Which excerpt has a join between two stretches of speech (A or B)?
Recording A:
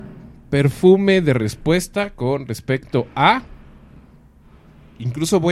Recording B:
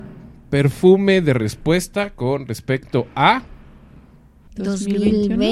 B